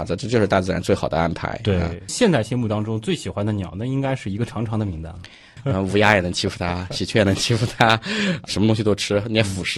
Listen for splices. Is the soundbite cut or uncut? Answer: cut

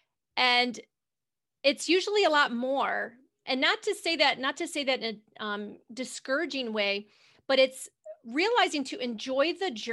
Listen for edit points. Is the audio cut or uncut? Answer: uncut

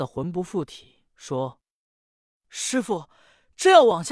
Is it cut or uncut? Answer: cut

